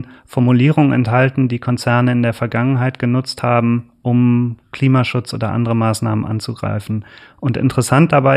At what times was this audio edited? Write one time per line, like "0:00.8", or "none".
none